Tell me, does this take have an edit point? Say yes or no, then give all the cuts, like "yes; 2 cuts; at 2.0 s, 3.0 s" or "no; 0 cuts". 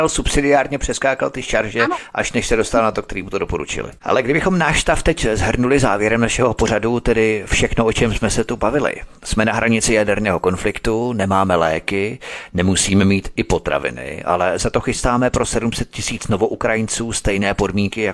yes; 1 cut; at 4.0 s